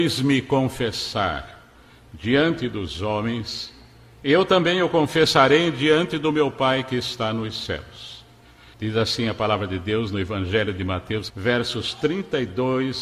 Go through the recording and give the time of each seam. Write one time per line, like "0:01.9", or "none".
0:08.7
0:11.3

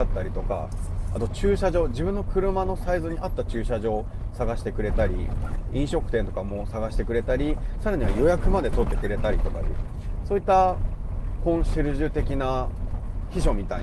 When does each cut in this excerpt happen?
none

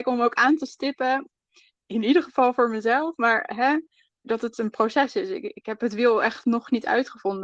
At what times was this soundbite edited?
0:04.2

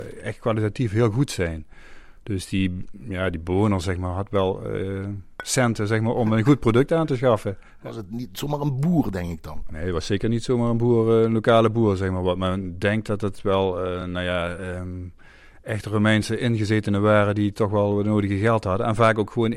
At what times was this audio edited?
none

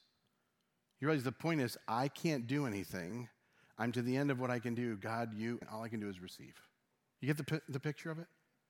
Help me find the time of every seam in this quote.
0:05.6

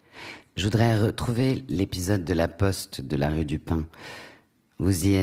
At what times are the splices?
none

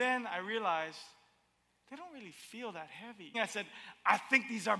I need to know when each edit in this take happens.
0:03.3

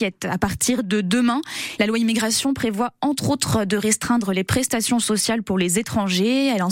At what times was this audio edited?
0:01.8

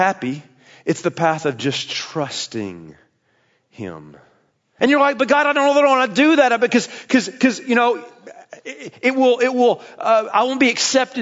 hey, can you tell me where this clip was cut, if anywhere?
0:04.8

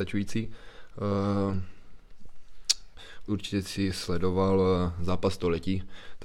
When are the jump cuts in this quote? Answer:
0:03.3

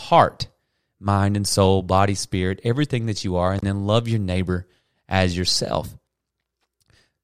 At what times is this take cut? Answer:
none

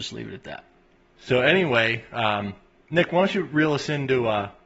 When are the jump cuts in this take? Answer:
none

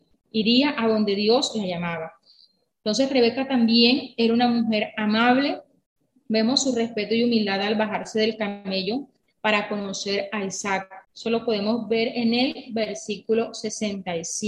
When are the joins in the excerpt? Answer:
0:11.0

